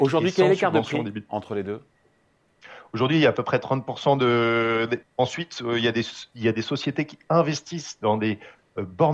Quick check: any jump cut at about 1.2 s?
no; 1 cut; at 5.0 s

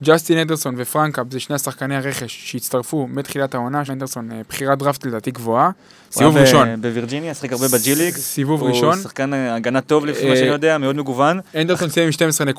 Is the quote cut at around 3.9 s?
yes; 1 cut; at 3.9 s

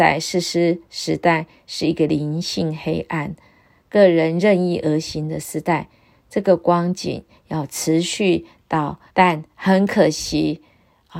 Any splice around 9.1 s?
yes; 1 cut; at 9.1 s

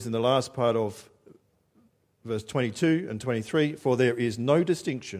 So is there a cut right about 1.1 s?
no; 0 cuts

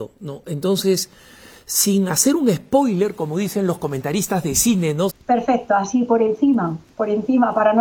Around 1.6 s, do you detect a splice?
no; 1 cut; at 5.1 s

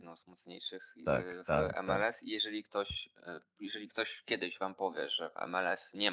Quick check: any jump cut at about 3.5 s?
no; 0 cuts

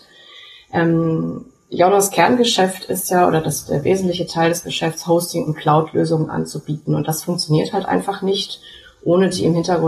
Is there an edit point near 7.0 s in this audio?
no; 0 cuts

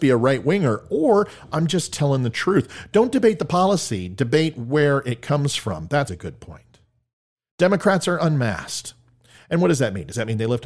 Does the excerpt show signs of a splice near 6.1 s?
yes; 1 cut; at 6.1 s

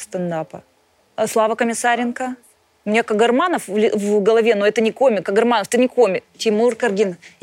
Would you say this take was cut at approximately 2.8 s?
no; 1 cut; at 6.2 s

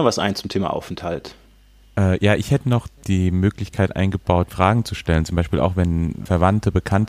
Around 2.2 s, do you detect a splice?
no; 0 cuts

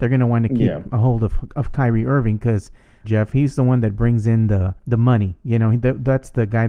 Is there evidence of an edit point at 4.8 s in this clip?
yes; 2 cuts; at 3.0 s, 4.8 s

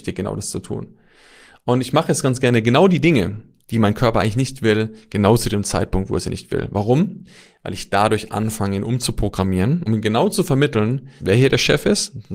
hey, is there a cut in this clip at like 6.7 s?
no; 2 cuts; at 9.9 s, 11.2 s

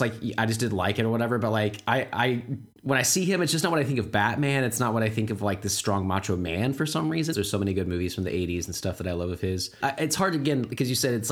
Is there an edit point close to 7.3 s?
yes; 2 cuts; at 7.3 s, 9.8 s

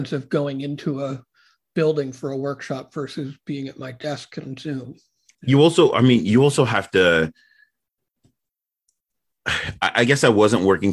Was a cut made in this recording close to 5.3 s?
yes; 1 cut; at 5.3 s

